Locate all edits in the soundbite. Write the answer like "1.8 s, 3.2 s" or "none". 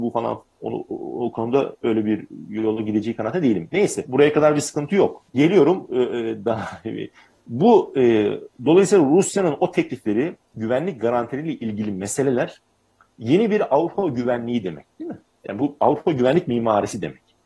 4.0 s, 5.3 s